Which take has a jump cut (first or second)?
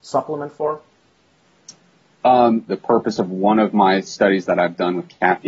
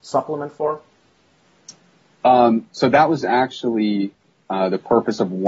first